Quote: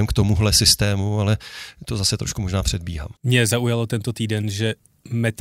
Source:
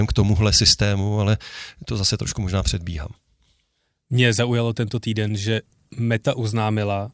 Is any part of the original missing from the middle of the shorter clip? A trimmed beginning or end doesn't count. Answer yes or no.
yes